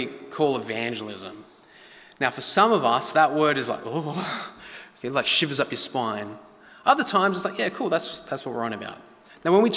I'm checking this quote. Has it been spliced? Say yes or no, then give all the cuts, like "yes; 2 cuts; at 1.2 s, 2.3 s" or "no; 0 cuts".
no; 0 cuts